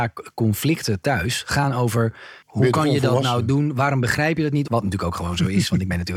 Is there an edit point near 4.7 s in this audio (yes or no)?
yes